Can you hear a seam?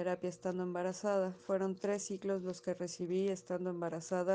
no; 0 cuts

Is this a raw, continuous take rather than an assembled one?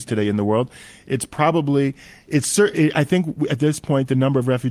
no; 1 cut; at 2.7 s

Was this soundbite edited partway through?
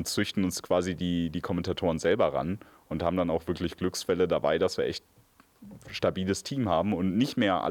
no; 0 cuts

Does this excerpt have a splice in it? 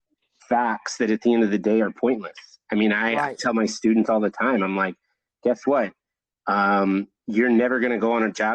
no; 0 cuts

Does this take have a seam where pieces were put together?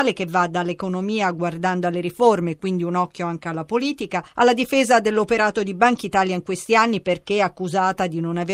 no; 0 cuts

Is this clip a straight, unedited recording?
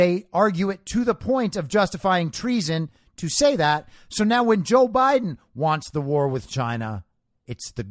yes; 0 cuts

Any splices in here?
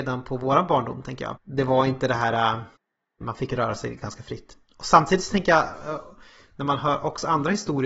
yes; 2 cuts; at 1.4 s, 3.2 s

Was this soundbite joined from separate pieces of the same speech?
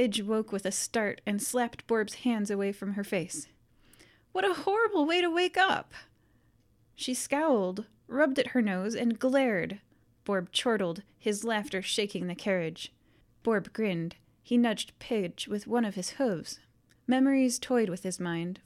yes; 2 cuts; at 13.2 s, 17.0 s

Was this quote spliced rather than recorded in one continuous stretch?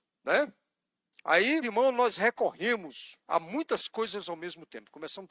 yes; 2 cuts; at 1.6 s, 3.2 s

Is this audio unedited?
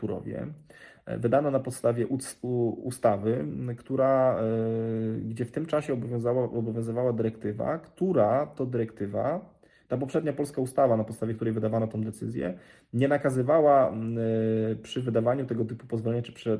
yes; 0 cuts

